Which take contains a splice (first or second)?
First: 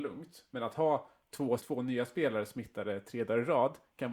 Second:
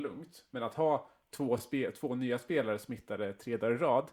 first